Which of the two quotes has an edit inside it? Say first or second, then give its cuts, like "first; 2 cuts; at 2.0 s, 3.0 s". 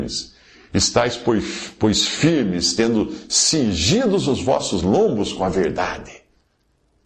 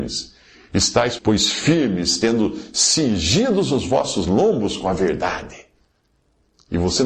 second; 1 cut; at 1.2 s